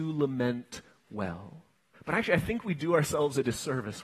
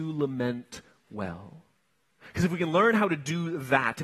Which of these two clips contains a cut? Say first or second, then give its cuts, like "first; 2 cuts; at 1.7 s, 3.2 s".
first; 1 cut; at 1.9 s